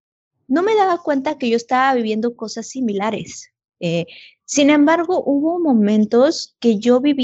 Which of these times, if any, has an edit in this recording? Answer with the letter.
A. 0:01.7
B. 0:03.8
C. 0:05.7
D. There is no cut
B